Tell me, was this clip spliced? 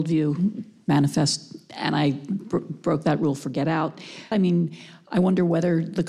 yes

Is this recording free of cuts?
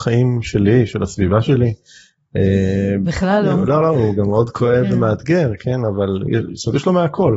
no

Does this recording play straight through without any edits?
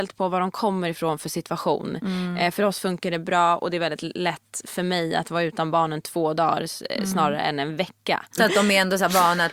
no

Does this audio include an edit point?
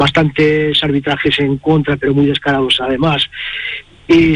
no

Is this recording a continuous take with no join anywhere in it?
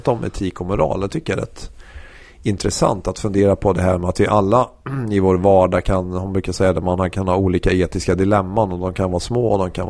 yes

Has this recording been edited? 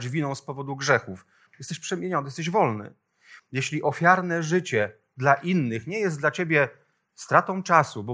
yes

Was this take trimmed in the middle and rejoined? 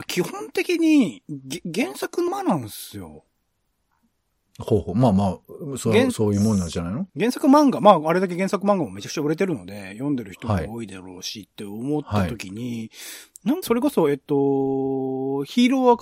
yes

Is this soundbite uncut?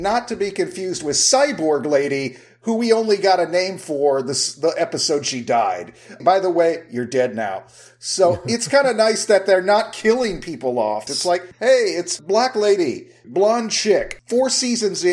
no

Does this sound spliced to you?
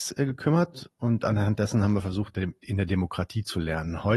yes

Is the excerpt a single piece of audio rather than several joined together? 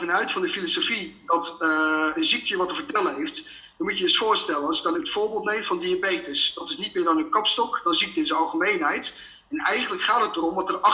no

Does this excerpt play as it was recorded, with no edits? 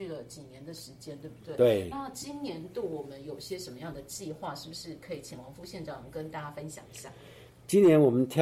yes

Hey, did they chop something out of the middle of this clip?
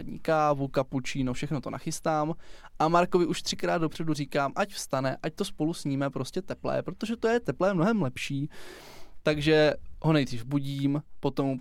no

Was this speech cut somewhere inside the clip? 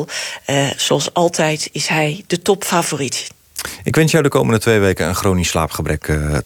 no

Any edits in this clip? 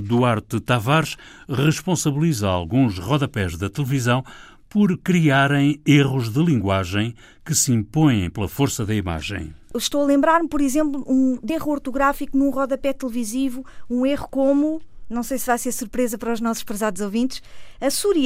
yes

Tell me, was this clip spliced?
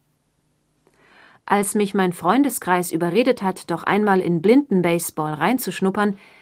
no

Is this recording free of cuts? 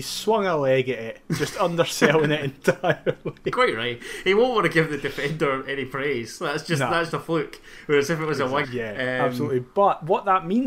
no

